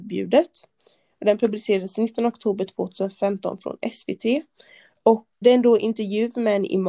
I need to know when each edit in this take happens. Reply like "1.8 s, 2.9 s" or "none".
5.4 s